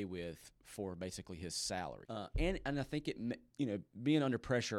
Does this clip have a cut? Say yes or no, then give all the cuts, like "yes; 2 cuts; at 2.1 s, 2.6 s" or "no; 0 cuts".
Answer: yes; 1 cut; at 2.1 s